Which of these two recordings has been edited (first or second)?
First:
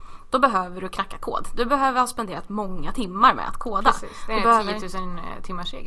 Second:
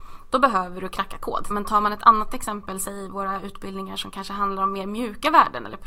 second